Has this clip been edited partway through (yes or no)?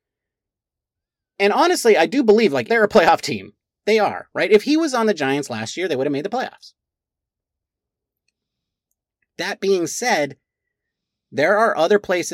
yes